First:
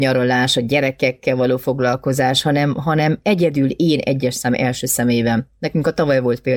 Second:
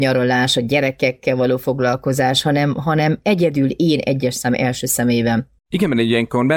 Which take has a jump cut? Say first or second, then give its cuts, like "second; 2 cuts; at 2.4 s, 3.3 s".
second; 1 cut; at 5.6 s